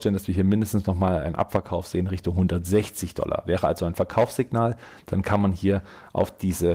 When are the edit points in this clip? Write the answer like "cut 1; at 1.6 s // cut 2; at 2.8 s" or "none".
none